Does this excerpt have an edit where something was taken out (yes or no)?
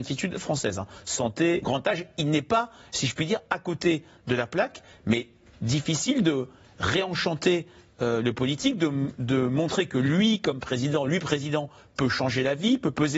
yes